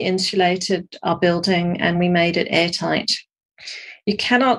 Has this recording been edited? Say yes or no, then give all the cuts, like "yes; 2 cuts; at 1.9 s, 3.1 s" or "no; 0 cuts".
no; 0 cuts